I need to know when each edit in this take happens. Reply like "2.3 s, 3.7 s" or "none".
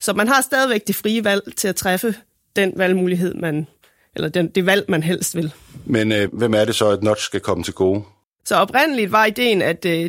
6.3 s, 8.2 s